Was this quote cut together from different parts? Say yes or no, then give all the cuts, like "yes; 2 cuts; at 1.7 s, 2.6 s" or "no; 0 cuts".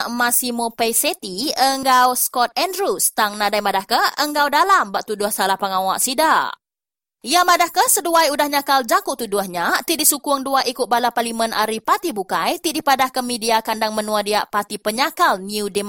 no; 0 cuts